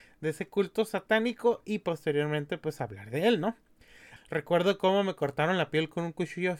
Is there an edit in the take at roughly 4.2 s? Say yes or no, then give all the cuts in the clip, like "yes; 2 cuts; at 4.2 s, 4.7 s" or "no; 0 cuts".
yes; 1 cut; at 4.2 s